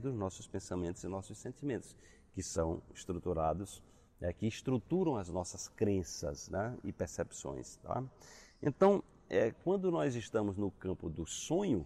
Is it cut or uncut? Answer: uncut